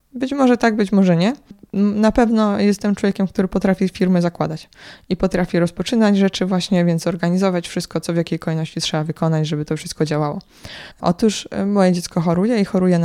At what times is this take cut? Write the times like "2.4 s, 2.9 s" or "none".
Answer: 10.9 s

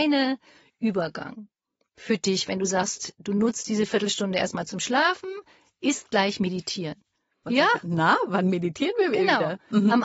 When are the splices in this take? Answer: 7.4 s

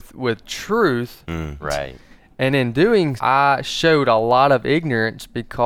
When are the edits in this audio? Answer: 1.6 s, 3.2 s

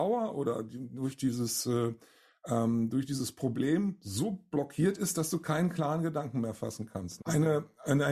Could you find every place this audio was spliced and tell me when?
7.2 s

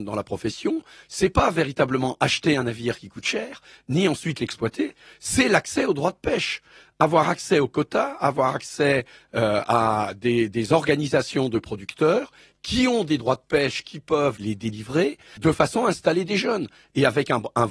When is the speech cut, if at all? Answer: 15.4 s

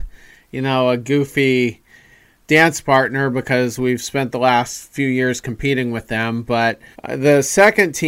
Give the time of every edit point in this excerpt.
6.9 s

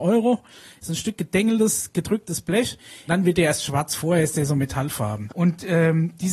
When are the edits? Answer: 3.1 s, 5.3 s

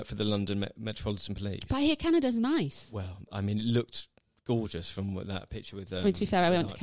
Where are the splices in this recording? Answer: none

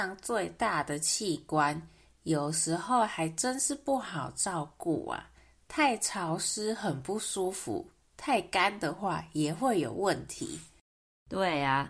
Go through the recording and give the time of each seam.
none

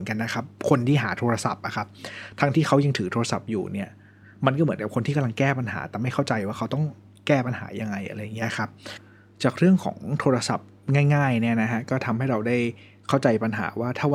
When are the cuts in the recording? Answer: 2.5 s

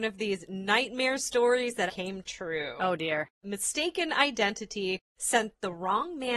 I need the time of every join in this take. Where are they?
1.9 s

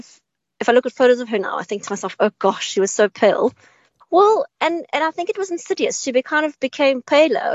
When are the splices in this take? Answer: 4.0 s

